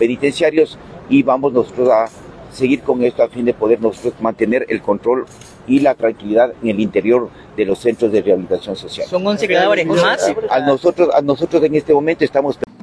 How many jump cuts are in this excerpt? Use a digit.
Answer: 1